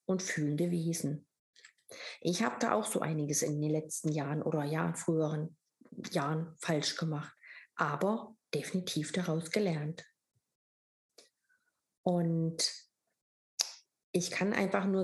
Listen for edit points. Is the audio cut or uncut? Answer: uncut